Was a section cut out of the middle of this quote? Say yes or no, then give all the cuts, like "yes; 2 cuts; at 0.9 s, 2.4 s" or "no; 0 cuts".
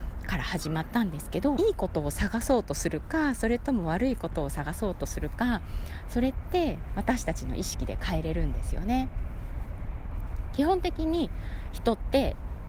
yes; 1 cut; at 1.6 s